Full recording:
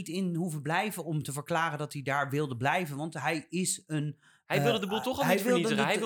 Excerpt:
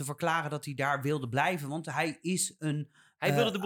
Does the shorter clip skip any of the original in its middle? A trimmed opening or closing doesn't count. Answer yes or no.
no